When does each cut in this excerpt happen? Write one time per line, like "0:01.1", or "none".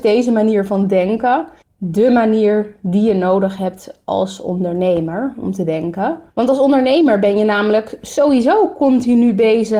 0:01.6
0:06.3